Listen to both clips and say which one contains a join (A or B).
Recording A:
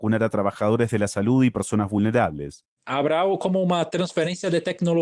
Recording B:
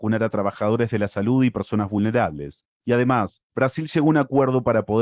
A